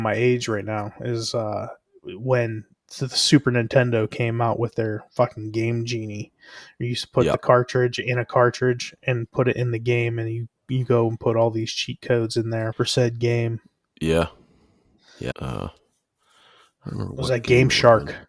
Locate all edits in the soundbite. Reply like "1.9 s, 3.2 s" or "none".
12.7 s, 15.3 s